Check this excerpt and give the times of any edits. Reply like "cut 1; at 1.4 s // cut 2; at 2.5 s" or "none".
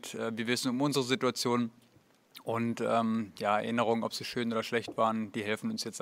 none